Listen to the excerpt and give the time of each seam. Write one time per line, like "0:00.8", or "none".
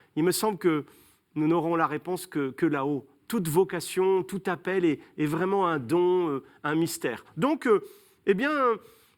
none